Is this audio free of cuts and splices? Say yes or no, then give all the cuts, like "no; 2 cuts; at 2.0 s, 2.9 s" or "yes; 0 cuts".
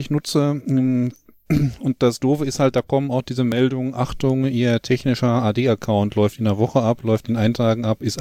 yes; 0 cuts